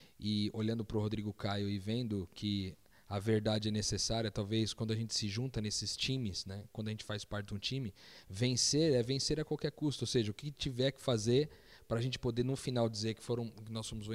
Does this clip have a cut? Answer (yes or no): no